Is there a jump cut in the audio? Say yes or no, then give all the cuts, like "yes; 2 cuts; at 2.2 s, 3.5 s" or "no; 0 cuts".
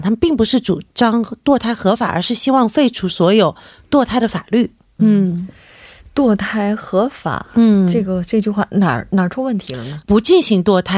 yes; 2 cuts; at 5.0 s, 10.0 s